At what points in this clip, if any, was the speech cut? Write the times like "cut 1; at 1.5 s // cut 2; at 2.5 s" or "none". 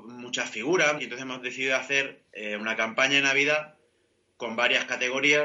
cut 1; at 1.0 s